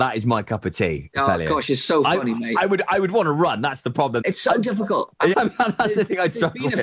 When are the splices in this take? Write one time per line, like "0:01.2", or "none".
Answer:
0:04.2
0:05.3